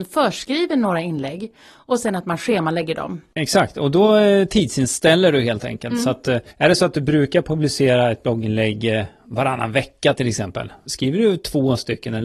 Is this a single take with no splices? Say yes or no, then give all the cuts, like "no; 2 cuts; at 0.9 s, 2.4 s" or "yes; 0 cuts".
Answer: no; 2 cuts; at 6.5 s, 10.9 s